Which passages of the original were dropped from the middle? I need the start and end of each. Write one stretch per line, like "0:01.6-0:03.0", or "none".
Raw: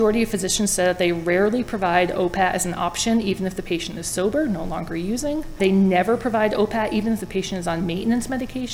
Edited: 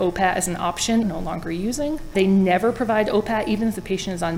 0:03.2-0:04.5